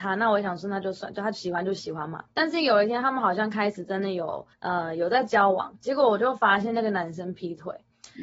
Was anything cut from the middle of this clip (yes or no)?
no